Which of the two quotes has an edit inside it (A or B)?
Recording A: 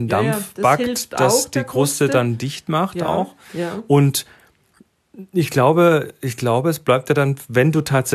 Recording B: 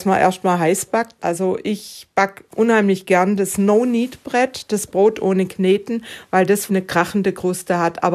B